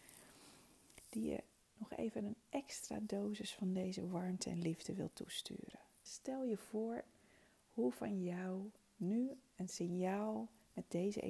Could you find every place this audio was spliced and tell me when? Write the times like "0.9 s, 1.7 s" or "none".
6.1 s